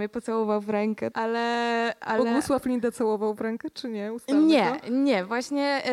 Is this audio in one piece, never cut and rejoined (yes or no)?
no